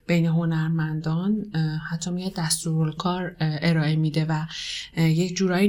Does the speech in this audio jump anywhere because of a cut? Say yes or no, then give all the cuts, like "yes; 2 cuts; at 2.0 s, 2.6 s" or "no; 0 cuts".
yes; 1 cut; at 3.0 s